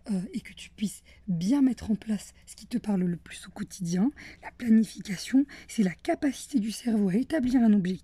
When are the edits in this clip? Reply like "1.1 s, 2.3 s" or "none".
none